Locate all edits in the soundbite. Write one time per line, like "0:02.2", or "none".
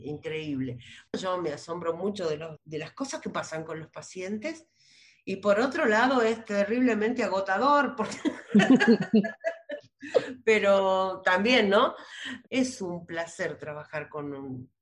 0:12.5